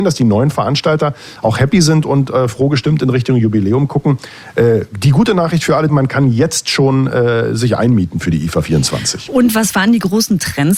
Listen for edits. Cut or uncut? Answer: cut